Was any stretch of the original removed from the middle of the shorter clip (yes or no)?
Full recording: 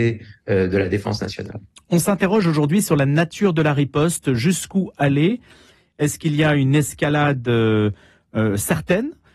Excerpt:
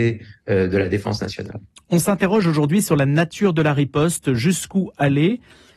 no